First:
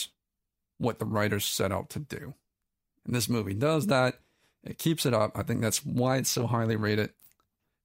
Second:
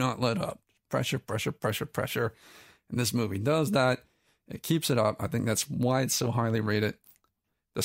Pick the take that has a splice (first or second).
first